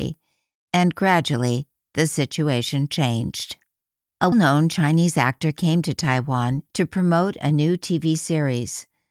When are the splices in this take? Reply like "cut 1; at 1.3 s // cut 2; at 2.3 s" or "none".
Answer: cut 1; at 4.3 s